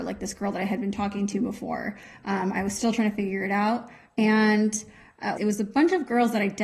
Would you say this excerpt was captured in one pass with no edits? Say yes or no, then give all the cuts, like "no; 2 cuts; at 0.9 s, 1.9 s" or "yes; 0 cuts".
no; 1 cut; at 5.4 s